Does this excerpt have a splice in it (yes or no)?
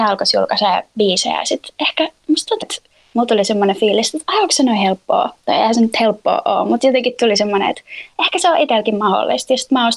yes